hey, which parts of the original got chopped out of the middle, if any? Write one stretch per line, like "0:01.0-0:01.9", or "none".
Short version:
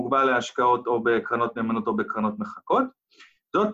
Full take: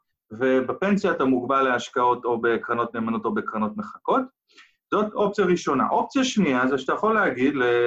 none